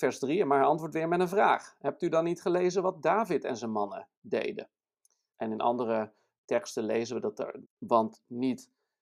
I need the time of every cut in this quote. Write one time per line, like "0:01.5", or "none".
0:05.3
0:07.6